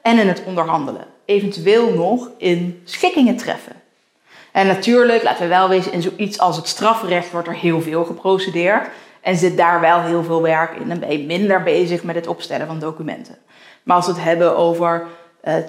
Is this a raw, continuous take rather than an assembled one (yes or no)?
yes